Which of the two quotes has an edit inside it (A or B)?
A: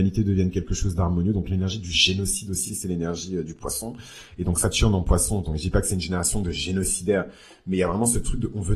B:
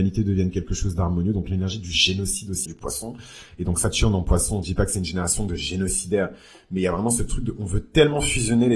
B